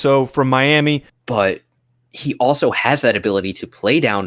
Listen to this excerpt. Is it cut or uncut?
cut